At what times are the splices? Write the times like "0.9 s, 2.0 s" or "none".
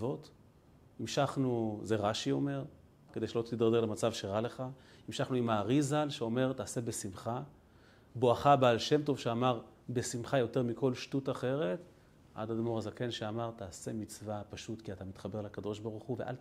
3.1 s